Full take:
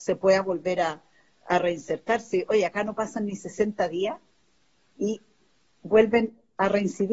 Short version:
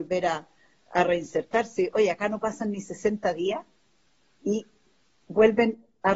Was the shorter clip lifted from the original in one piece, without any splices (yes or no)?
yes